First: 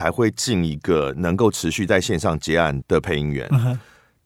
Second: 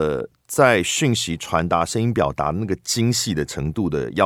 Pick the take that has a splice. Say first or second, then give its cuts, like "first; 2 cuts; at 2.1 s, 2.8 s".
first; 1 cut; at 2.8 s